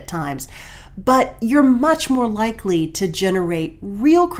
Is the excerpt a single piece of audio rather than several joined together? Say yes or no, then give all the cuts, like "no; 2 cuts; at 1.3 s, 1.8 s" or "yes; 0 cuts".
yes; 0 cuts